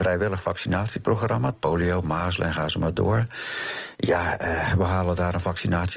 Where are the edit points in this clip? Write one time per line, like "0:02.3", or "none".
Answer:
0:01.5